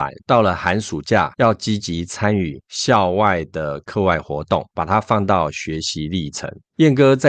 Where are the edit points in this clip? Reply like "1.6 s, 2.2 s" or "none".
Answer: none